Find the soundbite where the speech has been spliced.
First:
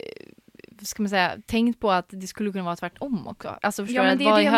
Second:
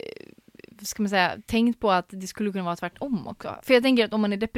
first; 1 cut; at 3.6 s

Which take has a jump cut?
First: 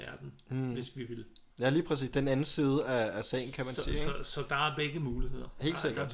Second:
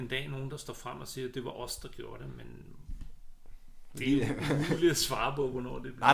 first; 1 cut; at 1.5 s

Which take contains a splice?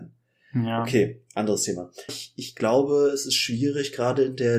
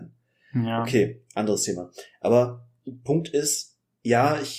first; 1 cut; at 2.1 s

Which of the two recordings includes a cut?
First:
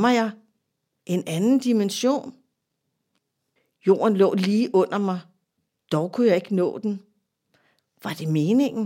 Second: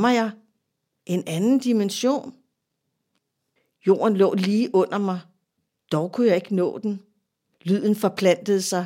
second; 1 cut; at 7.5 s

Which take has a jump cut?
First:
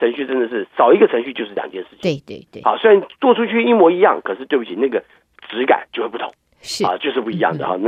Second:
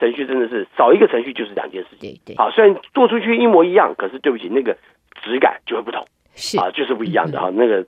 second; 1 cut; at 2.0 s

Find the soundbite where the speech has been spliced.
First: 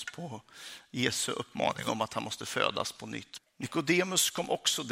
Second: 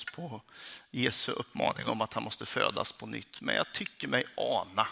first; 1 cut; at 3.4 s

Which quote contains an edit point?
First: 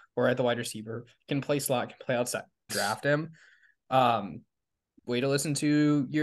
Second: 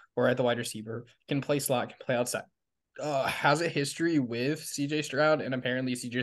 first; 1 cut; at 2.7 s

